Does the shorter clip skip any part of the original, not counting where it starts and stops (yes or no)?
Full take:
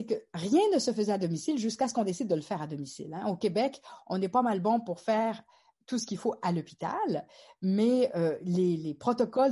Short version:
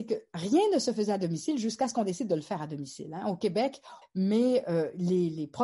yes